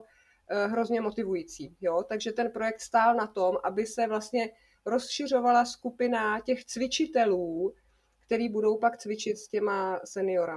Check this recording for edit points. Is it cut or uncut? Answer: uncut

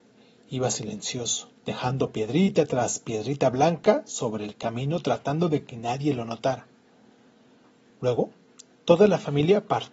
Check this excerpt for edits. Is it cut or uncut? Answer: cut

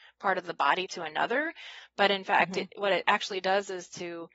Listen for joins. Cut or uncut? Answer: uncut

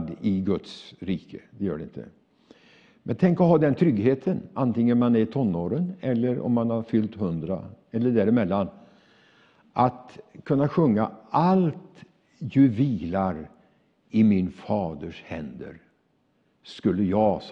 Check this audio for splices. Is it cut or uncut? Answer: uncut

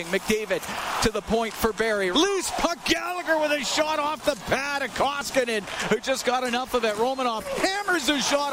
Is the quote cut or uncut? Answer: cut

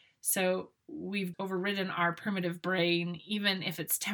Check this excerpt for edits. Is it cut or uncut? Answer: cut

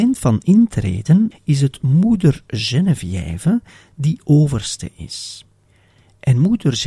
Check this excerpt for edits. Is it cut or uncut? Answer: cut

